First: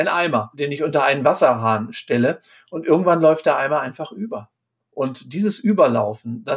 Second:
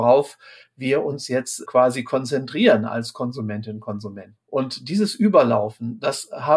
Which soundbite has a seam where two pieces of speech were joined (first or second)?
second